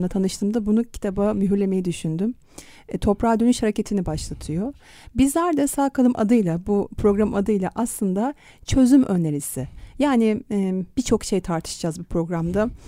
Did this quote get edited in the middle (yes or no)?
no